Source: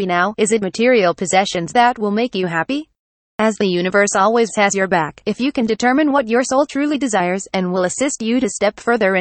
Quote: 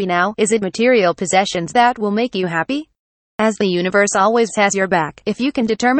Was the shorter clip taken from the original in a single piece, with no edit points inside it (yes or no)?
yes